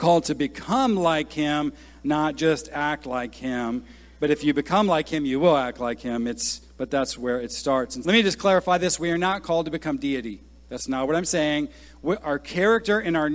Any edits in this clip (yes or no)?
yes